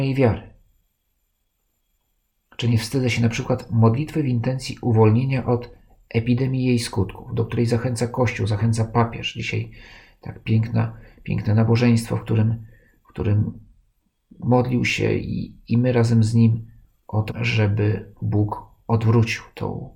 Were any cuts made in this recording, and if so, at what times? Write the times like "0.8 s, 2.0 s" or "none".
17.3 s